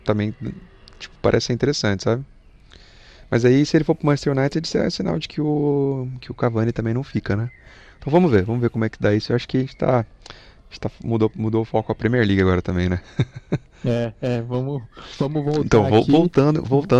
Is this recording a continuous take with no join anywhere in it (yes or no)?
yes